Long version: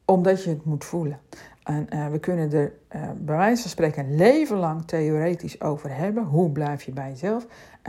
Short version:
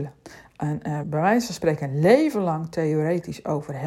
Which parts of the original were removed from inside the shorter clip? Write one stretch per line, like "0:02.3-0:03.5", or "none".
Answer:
0:02.1-0:03.2